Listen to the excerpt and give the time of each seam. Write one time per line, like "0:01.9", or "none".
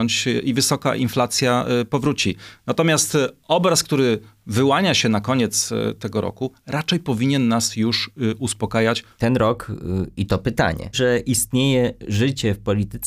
0:09.2
0:10.9